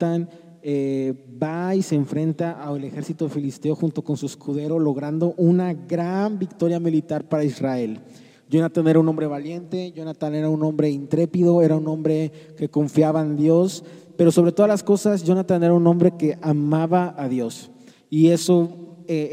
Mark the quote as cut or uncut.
uncut